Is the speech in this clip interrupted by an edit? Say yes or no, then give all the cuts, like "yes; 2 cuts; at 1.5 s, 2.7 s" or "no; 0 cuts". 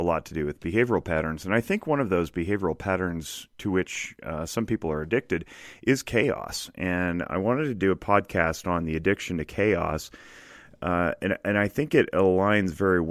no; 0 cuts